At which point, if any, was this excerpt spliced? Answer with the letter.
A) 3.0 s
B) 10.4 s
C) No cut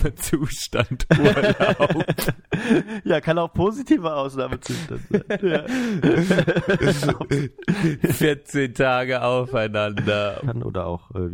B